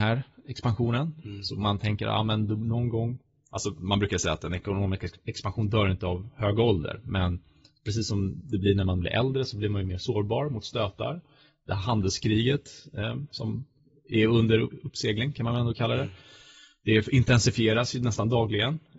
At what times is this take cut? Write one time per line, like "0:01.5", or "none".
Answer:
none